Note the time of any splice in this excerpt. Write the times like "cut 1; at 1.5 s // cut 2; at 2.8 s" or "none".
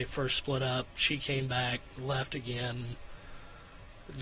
none